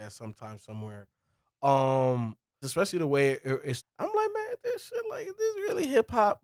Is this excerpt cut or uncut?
cut